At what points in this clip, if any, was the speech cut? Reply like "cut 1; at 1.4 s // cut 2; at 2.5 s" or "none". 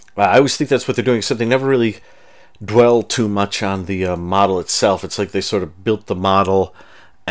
none